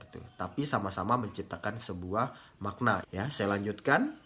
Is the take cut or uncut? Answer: cut